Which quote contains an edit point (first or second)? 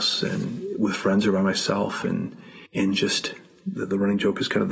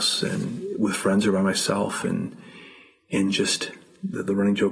first